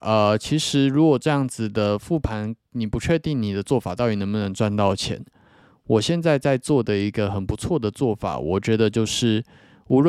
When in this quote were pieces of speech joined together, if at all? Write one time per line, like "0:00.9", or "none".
none